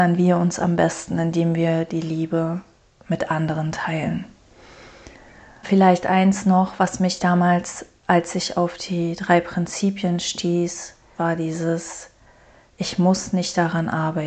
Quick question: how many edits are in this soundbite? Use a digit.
2